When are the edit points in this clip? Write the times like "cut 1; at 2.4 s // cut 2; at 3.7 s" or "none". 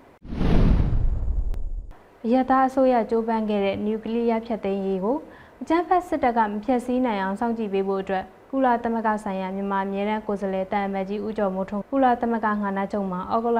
cut 1; at 11.8 s